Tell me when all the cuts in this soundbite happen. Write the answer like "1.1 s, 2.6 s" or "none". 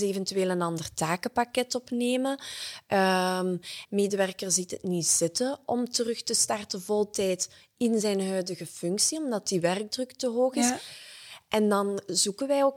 3.9 s